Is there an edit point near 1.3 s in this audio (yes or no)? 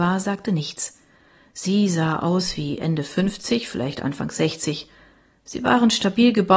no